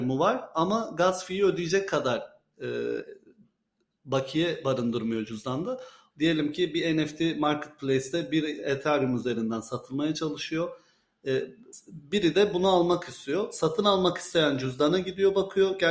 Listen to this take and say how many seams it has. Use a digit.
1